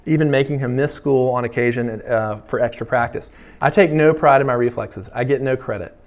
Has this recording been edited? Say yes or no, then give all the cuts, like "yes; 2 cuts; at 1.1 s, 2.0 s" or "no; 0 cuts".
yes; 1 cut; at 3.6 s